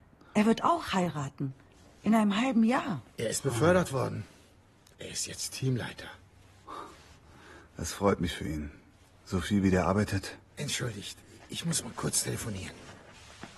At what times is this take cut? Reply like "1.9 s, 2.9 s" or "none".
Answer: none